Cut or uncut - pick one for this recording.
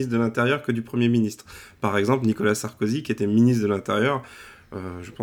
uncut